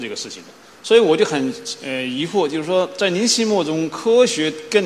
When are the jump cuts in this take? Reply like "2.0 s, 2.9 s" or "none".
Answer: none